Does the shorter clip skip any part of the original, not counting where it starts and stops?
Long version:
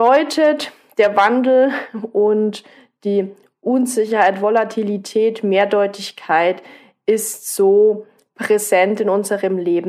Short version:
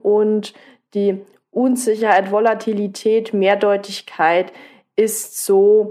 no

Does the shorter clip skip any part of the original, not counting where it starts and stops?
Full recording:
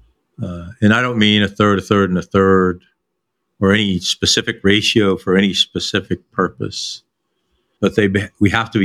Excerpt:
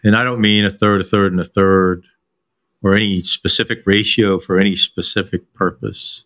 no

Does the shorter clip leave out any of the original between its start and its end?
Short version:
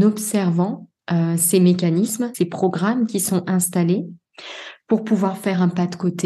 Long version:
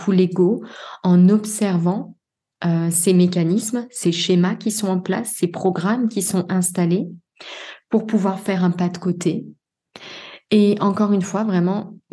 yes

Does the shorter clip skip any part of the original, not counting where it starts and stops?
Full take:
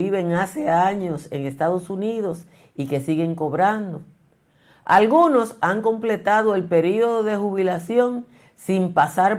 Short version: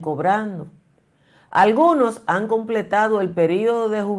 no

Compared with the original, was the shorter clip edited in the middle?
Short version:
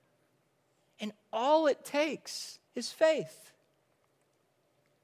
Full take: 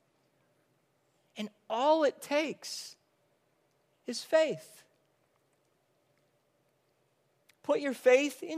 yes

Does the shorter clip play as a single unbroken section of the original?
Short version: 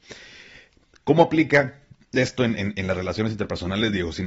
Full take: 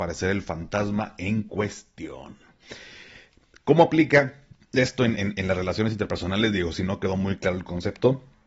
yes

